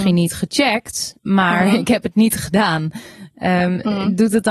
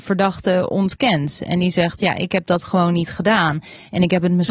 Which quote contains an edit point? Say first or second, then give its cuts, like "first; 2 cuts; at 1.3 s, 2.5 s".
first; 1 cut; at 1.2 s